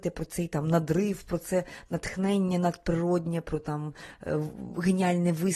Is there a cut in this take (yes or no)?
no